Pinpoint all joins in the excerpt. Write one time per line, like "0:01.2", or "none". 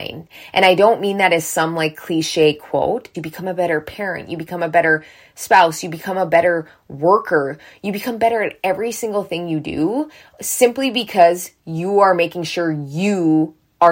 0:03.1